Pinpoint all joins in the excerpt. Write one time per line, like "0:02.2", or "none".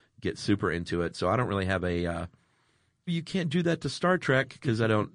0:03.1